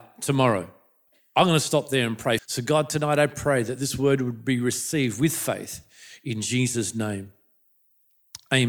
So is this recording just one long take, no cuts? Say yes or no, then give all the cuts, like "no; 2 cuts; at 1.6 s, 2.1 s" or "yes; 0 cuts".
no; 1 cut; at 2.4 s